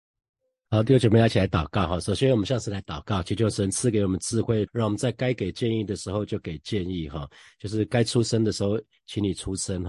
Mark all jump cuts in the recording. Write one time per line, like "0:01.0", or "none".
0:04.7